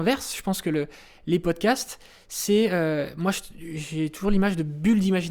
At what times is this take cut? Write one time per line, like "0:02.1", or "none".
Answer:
none